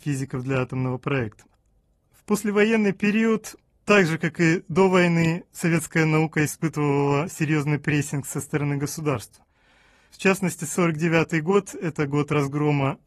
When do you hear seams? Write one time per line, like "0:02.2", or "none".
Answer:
none